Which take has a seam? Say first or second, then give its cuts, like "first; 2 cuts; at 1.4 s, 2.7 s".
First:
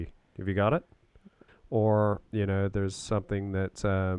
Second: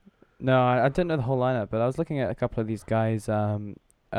first; 1 cut; at 1.5 s